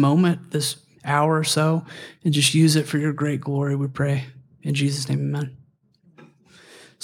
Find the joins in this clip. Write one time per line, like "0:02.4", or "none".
none